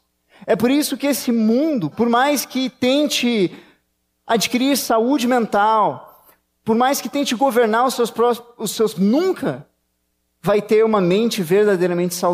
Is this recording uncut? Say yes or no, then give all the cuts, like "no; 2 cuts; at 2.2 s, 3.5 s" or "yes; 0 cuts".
no; 2 cuts; at 1.9 s, 8.9 s